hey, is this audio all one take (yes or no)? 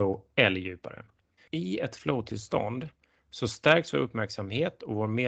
no